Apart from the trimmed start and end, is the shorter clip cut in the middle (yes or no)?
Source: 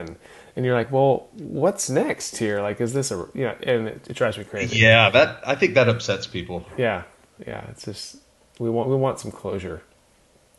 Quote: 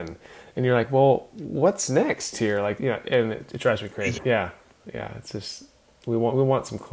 yes